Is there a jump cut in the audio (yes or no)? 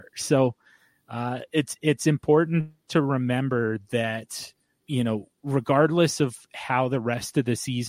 yes